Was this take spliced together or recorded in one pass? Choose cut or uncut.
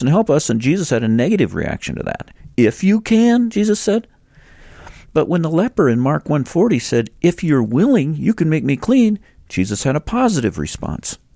uncut